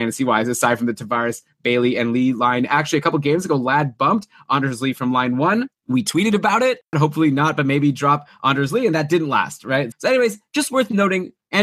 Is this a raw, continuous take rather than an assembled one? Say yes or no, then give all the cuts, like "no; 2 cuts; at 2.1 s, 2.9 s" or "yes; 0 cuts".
no; 2 cuts; at 6.9 s, 9.9 s